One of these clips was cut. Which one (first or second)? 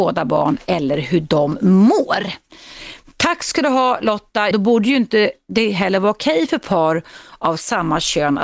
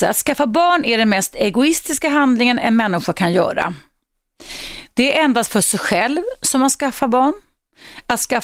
first